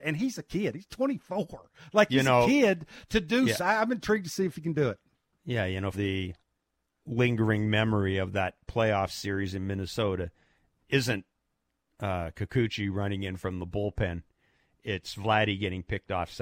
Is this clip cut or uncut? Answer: cut